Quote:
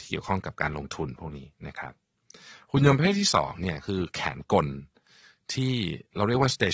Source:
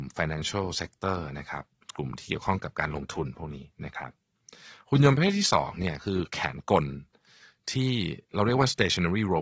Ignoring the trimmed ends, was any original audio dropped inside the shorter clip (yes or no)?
no